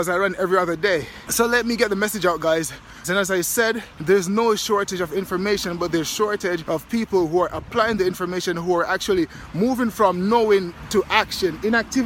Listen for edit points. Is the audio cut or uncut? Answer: cut